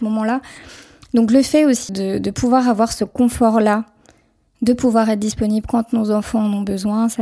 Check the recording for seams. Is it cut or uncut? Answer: cut